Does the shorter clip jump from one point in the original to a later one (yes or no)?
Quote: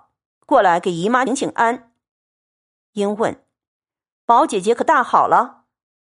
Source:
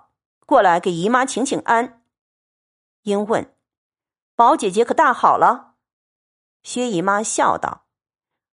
yes